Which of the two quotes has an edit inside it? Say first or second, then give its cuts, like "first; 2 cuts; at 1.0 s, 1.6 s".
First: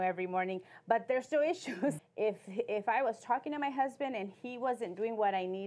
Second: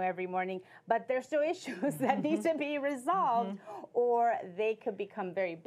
first; 1 cut; at 2.0 s